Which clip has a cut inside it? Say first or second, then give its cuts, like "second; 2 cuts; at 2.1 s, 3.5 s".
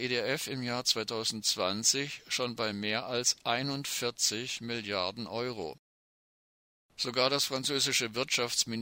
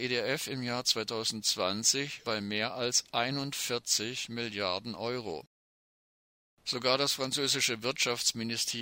second; 1 cut; at 2.2 s